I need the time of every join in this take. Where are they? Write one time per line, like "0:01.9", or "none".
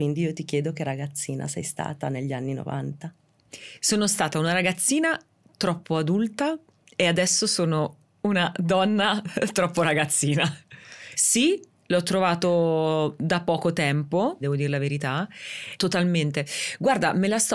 0:11.1
0:14.4
0:15.8